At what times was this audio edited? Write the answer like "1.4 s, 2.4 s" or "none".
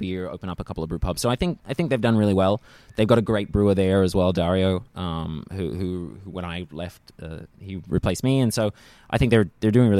none